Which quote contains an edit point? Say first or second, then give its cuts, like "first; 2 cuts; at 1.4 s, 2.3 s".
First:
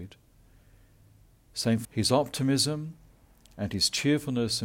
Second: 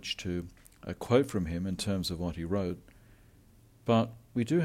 first; 1 cut; at 1.8 s